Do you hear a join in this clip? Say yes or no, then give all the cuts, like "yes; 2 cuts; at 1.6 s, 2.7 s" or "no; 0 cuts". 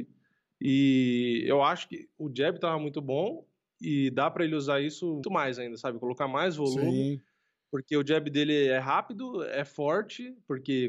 yes; 1 cut; at 5.2 s